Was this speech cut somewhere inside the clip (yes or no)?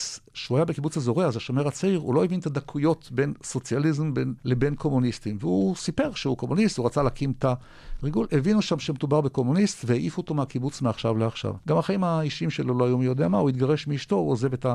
yes